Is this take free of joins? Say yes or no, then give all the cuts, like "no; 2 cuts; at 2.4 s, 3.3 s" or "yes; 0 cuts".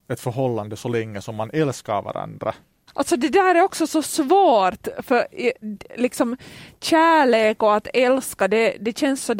no; 1 cut; at 2.9 s